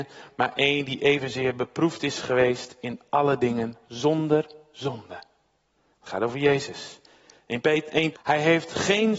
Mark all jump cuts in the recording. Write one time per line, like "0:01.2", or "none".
0:08.1